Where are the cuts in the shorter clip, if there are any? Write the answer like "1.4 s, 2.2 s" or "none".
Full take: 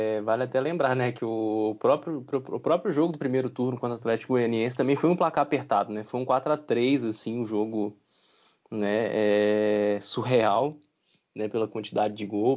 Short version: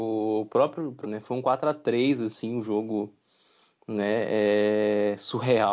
1.0 s